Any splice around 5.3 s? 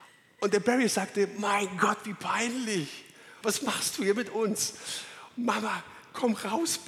no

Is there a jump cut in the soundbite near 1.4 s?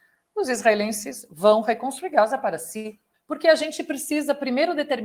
no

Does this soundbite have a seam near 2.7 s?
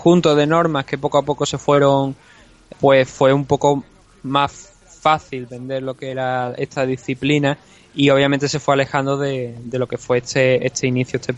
yes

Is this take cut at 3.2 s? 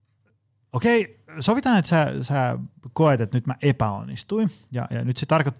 no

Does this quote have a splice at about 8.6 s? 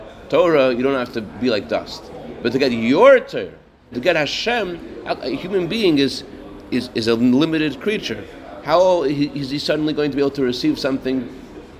no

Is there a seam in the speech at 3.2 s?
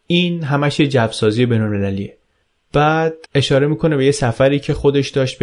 yes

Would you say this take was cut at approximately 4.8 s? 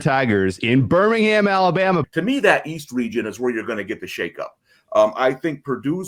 no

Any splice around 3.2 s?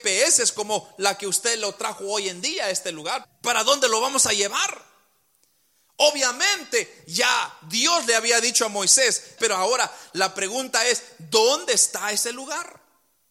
yes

